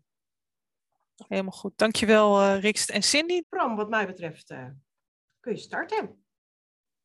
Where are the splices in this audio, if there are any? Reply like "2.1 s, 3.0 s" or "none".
1.3 s, 3.4 s